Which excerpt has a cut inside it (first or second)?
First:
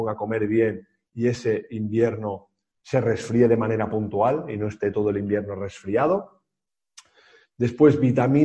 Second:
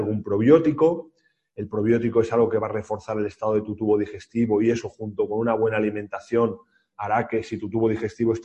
second